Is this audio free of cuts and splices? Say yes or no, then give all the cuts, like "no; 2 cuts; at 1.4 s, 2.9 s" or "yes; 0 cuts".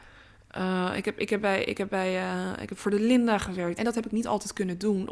no; 1 cut; at 3.8 s